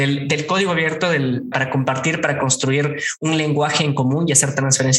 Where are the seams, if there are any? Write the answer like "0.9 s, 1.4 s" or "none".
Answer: 1.5 s